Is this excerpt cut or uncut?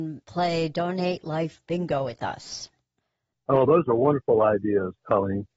cut